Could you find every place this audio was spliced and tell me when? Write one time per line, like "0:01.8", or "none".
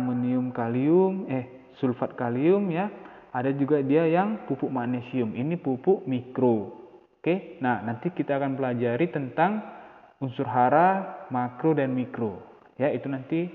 none